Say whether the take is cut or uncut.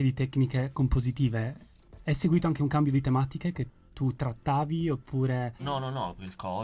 cut